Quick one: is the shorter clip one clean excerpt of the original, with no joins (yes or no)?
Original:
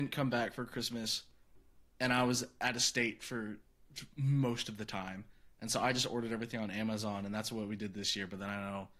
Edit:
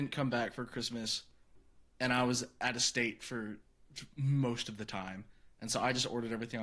yes